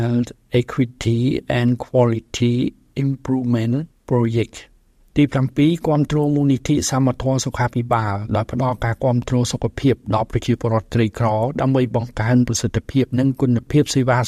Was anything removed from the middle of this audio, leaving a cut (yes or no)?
yes